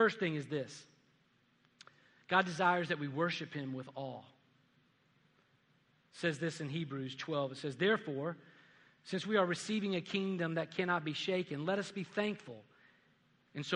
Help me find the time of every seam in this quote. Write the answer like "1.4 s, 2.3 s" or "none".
none